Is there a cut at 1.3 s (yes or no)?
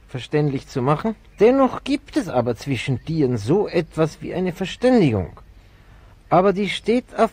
yes